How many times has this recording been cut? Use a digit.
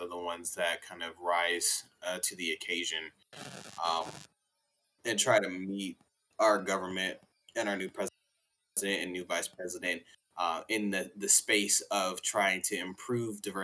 0